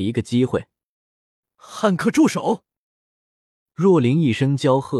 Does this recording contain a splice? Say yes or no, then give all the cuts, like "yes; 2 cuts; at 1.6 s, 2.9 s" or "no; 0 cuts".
no; 0 cuts